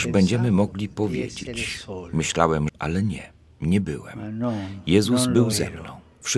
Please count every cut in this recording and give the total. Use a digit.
1